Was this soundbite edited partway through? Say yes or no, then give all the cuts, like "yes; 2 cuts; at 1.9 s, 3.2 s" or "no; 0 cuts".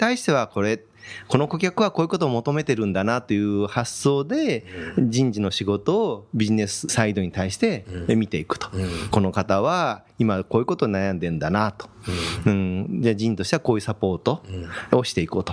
no; 0 cuts